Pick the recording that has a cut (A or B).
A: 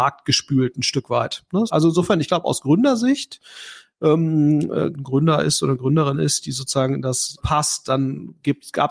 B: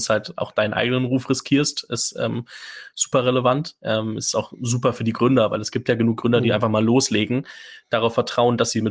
A